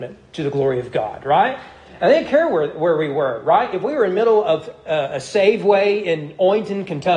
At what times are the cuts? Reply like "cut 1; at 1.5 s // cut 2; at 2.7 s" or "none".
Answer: none